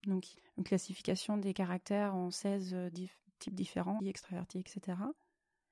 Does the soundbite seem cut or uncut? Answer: cut